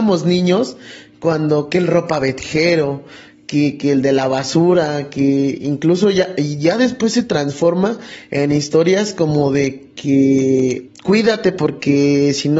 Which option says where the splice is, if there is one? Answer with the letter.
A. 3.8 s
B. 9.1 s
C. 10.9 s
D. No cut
C